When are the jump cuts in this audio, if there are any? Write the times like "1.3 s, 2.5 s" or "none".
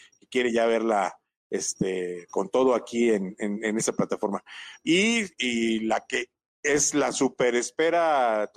2.3 s, 4.8 s